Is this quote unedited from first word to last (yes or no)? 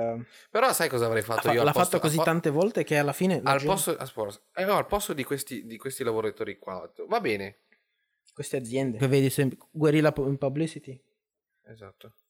no